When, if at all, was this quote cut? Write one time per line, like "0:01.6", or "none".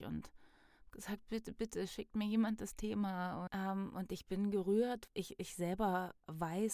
0:03.5
0:05.1